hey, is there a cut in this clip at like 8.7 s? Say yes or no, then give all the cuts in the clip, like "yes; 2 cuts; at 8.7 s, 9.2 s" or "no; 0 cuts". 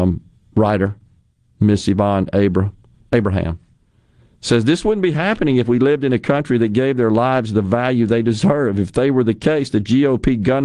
no; 0 cuts